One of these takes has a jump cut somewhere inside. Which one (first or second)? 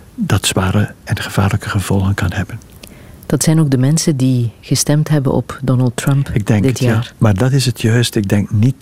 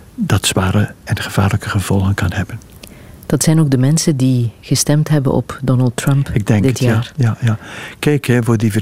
first